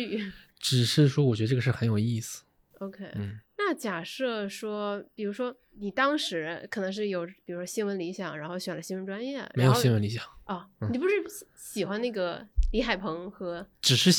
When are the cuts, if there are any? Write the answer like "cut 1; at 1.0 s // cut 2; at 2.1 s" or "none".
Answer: none

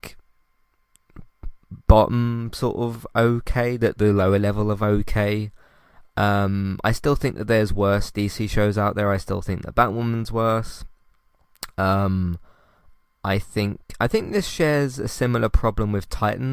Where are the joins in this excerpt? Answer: none

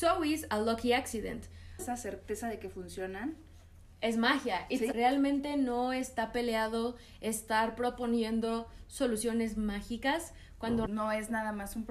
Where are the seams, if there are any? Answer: cut 1; at 1.8 s // cut 2; at 4.9 s // cut 3; at 10.9 s

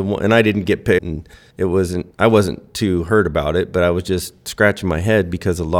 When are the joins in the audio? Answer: cut 1; at 1.0 s

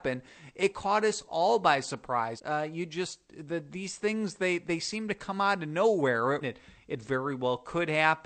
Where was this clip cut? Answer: cut 1; at 2.4 s // cut 2; at 6.4 s

